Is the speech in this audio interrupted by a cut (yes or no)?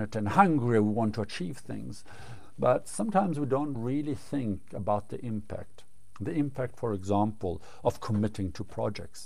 no